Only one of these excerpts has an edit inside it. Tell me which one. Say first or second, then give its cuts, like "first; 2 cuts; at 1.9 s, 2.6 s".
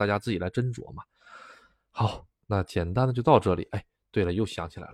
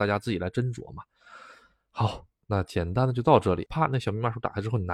second; 1 cut; at 3.7 s